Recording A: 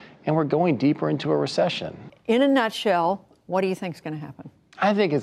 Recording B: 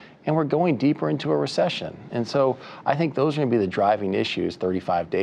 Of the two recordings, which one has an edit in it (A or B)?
A